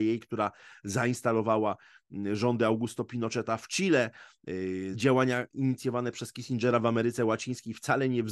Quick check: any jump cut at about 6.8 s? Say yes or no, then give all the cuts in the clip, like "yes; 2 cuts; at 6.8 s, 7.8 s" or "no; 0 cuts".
no; 1 cut; at 4.9 s